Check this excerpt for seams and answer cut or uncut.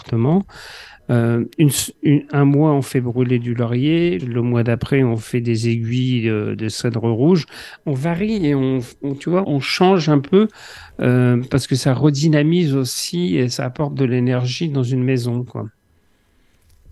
cut